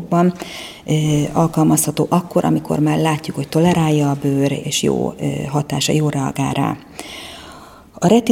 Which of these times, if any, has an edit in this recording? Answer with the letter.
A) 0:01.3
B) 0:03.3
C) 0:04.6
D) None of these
C